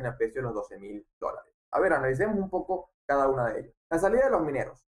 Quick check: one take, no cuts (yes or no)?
no